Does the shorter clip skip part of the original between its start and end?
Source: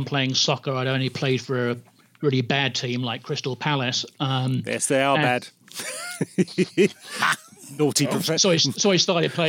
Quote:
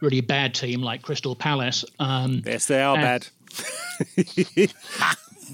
no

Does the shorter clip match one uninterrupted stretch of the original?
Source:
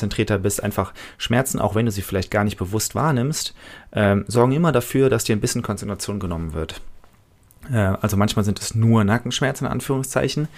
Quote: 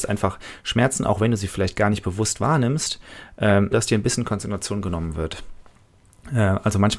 no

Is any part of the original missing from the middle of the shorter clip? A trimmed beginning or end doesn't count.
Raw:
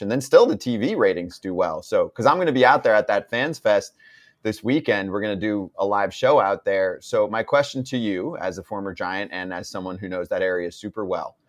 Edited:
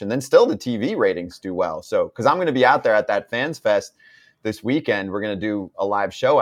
no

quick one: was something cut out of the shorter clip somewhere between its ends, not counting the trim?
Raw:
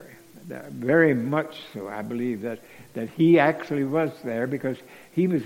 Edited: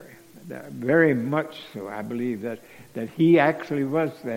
no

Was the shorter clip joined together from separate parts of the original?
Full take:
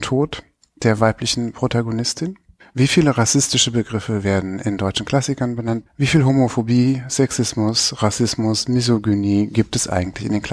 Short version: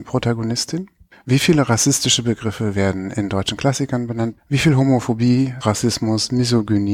yes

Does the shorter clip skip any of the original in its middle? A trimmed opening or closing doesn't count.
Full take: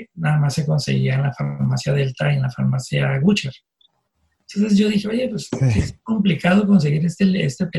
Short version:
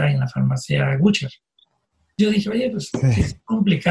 yes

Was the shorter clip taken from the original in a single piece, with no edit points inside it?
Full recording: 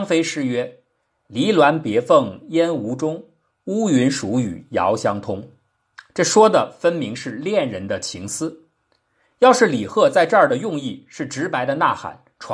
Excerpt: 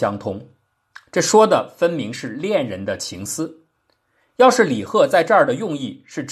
yes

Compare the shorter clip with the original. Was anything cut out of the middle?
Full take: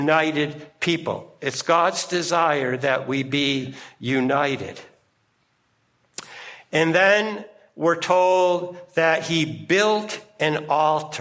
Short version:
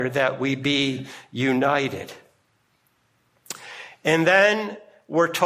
no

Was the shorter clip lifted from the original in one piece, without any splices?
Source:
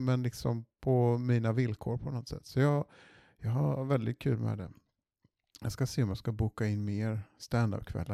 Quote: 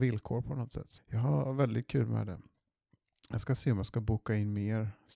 no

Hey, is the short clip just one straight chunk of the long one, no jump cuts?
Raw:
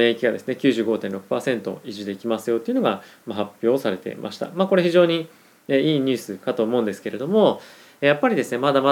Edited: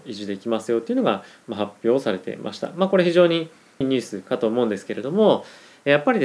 no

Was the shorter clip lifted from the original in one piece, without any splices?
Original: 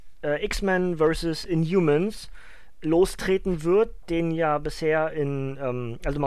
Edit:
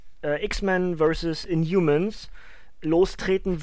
yes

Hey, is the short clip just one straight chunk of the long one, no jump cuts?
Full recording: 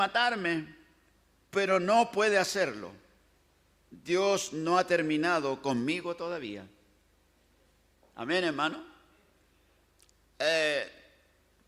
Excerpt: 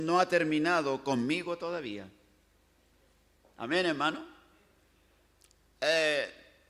yes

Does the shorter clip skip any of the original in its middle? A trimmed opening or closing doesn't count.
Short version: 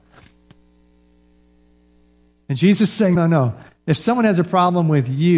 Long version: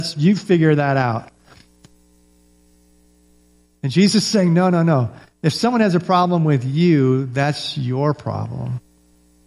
yes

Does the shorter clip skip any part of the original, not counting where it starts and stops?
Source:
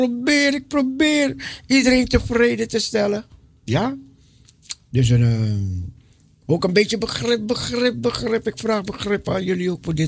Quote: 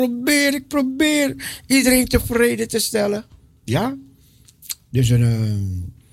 no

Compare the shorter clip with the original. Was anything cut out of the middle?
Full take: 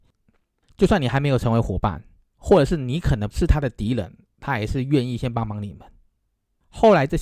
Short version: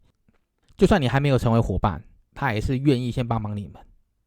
yes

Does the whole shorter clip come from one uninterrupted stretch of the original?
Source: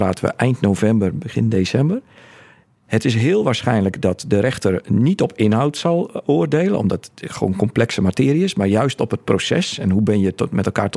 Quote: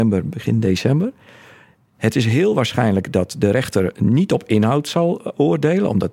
yes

